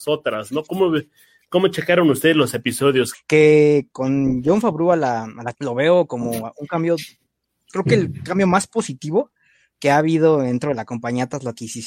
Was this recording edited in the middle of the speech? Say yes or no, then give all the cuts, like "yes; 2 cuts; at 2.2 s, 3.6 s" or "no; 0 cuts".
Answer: yes; 2 cuts; at 3.1 s, 5.5 s